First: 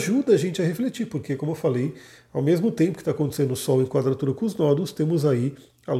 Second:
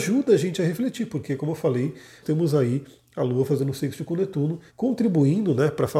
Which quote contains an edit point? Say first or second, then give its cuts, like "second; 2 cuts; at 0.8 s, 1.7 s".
second; 2 cuts; at 2.2 s, 4.7 s